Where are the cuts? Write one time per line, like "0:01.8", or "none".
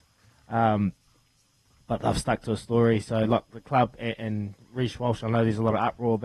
0:04.2